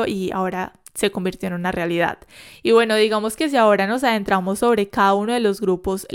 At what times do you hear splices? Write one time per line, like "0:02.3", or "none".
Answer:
none